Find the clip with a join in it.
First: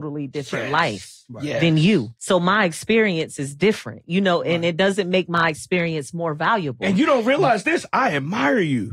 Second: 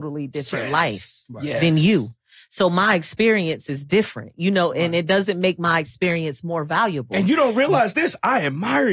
first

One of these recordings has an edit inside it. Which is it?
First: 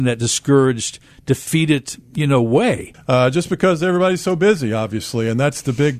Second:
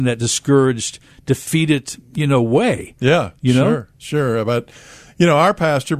first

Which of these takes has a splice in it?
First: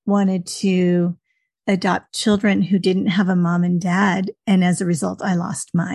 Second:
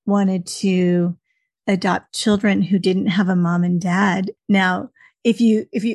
second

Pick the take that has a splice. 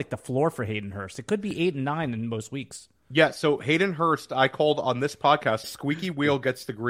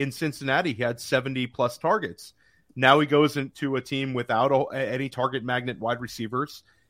first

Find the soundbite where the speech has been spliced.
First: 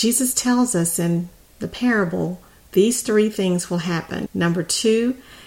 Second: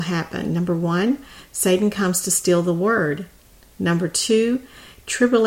first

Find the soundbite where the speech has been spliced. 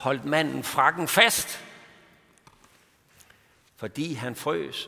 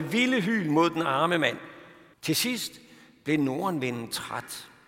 second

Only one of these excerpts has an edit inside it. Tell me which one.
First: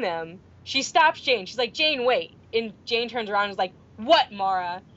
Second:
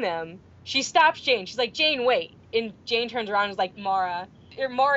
second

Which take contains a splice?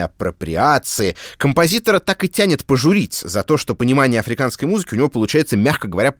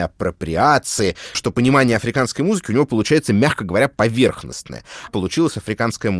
second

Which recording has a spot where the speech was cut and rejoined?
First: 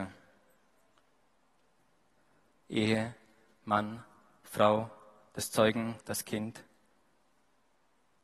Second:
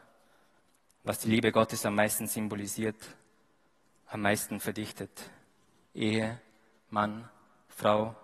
first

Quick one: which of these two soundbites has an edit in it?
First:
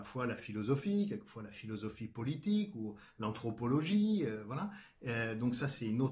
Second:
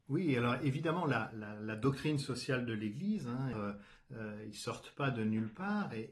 second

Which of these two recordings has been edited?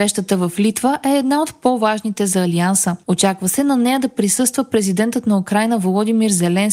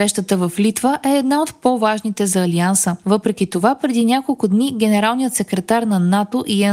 second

